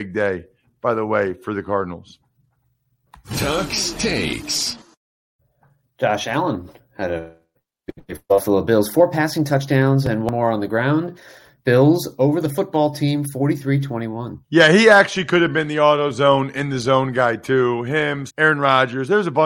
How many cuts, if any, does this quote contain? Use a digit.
2